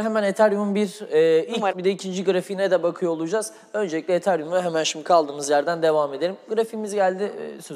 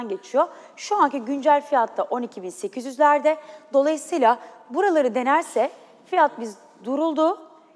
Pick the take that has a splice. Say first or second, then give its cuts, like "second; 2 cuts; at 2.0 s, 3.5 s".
first; 1 cut; at 1.7 s